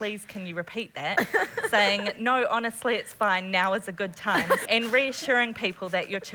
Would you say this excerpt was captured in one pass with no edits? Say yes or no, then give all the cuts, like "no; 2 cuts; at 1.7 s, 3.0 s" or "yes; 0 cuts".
no; 1 cut; at 4.7 s